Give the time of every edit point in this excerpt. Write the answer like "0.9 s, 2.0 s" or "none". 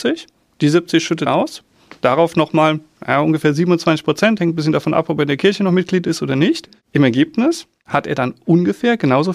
1.3 s